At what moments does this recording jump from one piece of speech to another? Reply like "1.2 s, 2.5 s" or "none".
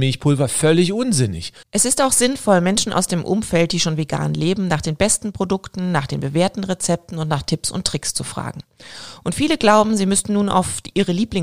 1.6 s